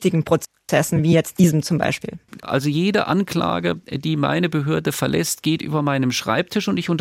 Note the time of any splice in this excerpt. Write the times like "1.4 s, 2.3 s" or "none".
2.4 s